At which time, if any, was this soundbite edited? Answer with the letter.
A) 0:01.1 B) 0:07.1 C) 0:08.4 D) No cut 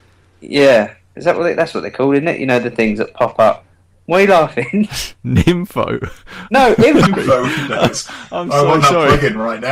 B